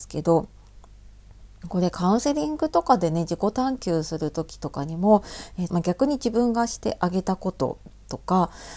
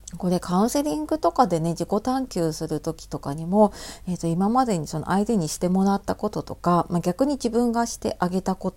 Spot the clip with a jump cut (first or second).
first